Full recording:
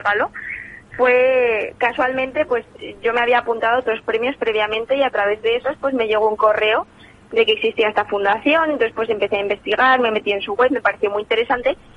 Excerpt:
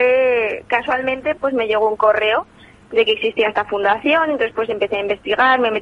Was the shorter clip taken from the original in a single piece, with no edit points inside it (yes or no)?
no